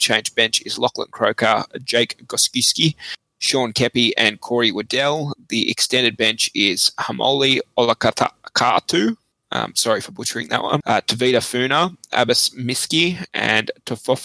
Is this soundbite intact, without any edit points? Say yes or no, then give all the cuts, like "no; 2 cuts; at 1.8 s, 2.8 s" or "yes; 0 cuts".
no; 1 cut; at 10.8 s